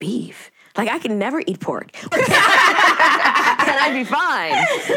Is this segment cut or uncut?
cut